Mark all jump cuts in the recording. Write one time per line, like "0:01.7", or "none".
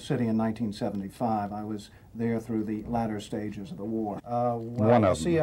0:04.2